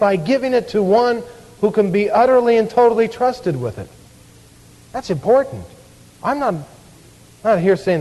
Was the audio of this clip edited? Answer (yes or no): yes